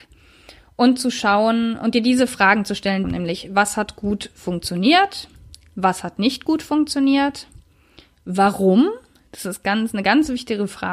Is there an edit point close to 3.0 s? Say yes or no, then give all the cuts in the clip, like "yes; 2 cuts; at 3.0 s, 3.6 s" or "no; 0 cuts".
yes; 1 cut; at 3.0 s